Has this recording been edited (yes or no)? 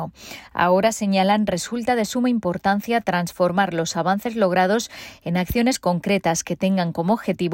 no